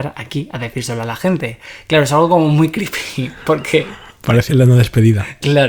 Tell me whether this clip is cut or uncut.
cut